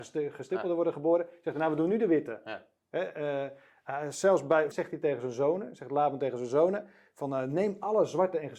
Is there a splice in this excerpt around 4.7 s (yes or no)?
yes